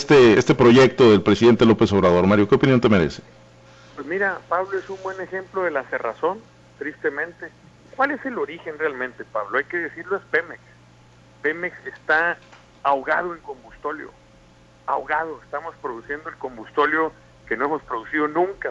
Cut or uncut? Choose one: uncut